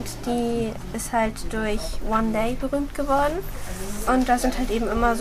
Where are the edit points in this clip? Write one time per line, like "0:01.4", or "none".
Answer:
0:04.1